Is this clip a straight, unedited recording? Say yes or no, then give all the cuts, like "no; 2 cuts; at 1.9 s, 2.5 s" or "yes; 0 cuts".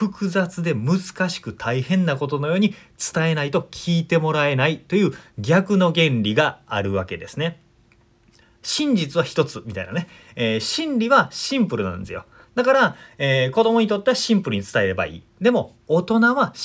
yes; 0 cuts